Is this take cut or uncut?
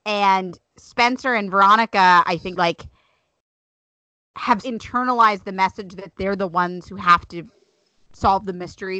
cut